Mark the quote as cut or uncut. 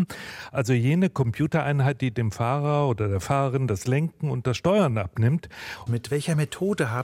cut